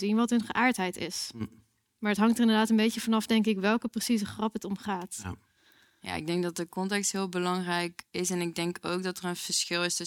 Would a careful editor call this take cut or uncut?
uncut